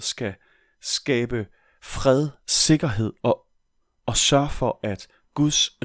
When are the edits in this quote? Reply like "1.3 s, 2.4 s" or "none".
none